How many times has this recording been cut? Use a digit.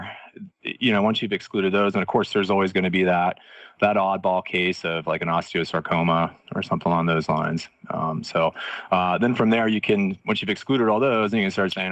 0